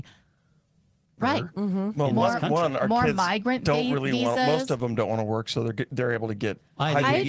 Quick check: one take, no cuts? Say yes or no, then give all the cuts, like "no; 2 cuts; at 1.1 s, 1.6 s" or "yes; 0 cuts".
no; 1 cut; at 1.2 s